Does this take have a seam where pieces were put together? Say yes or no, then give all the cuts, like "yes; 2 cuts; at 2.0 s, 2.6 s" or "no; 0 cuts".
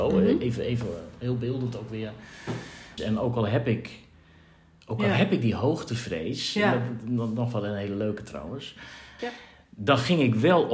yes; 2 cuts; at 3.0 s, 9.2 s